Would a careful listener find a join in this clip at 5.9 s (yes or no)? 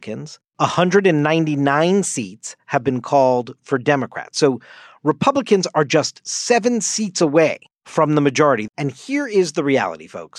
no